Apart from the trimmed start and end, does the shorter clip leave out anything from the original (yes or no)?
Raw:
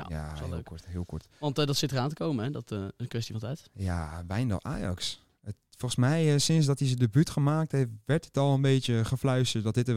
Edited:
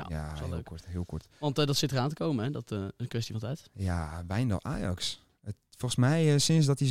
no